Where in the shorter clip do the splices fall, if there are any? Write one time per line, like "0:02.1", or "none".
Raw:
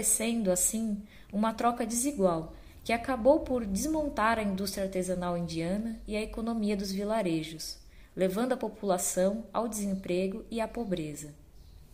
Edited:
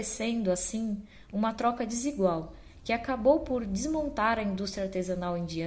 none